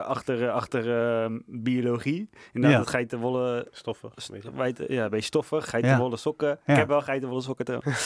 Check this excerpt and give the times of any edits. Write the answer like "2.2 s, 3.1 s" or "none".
none